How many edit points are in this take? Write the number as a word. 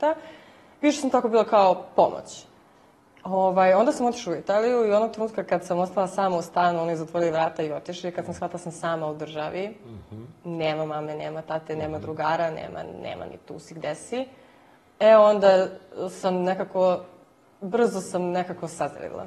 zero